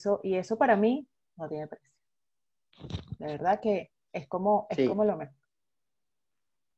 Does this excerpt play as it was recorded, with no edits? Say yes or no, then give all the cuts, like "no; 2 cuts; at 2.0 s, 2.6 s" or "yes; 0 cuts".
yes; 0 cuts